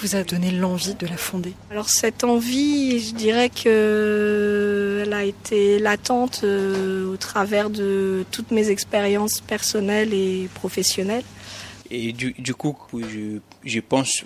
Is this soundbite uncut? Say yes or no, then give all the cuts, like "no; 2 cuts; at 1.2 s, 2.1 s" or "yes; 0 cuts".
no; 2 cuts; at 11.8 s, 12.9 s